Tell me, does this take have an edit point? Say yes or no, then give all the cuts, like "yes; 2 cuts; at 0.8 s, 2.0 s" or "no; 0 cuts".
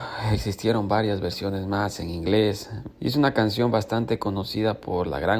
yes; 1 cut; at 2.9 s